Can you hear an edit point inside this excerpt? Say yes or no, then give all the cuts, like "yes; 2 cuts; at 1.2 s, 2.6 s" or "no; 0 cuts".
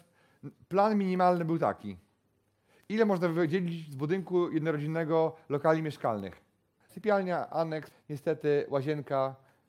yes; 2 cuts; at 6.9 s, 7.9 s